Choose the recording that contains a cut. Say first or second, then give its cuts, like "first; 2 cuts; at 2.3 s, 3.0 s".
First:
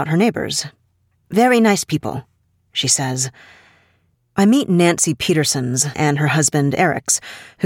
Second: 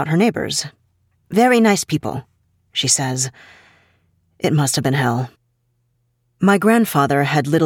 first; 2 cuts; at 4.1 s, 5.9 s